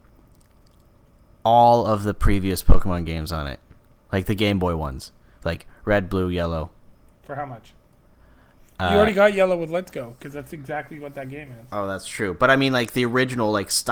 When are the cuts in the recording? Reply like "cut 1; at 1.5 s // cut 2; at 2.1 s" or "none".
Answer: none

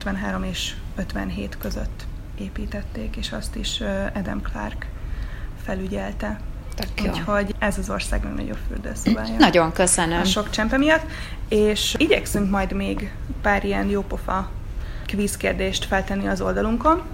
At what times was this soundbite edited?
none

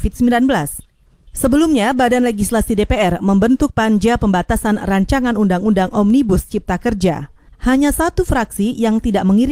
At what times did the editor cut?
cut 1; at 7.5 s

